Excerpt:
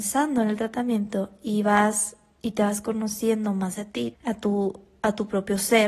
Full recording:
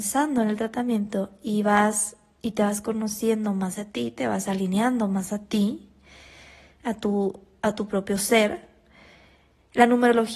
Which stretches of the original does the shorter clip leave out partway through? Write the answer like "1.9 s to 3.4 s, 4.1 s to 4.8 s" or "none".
4.1 s to 6.7 s